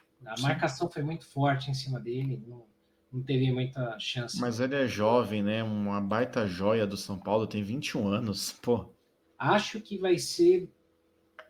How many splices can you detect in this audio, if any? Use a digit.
1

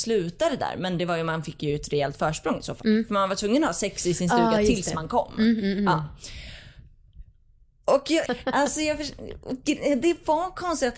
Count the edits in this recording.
1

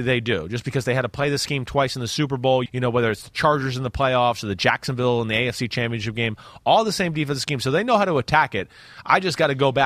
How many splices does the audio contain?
1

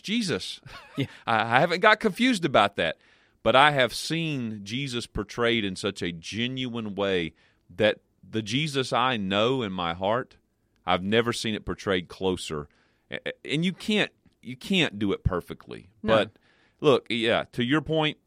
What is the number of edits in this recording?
0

